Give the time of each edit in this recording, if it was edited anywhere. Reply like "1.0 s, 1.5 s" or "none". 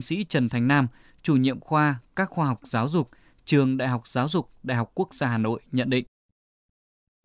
none